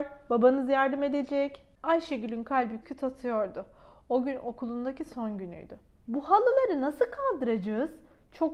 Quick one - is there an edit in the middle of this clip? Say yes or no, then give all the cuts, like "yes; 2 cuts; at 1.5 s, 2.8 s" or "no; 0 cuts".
yes; 2 cuts; at 2.8 s, 5.9 s